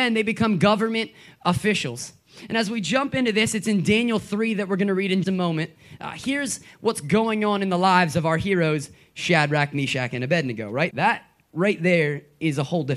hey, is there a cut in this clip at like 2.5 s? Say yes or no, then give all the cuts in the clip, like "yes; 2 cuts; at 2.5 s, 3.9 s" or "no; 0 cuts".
no; 2 cuts; at 5.2 s, 10.9 s